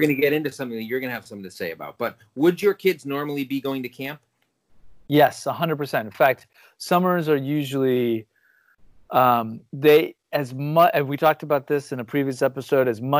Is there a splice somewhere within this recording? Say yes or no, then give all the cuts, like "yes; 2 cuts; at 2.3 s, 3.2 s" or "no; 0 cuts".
no; 0 cuts